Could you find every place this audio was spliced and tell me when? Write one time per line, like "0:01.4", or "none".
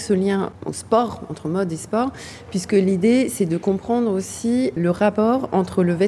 0:04.8